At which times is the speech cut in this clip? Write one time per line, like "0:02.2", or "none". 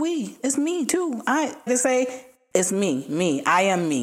0:01.7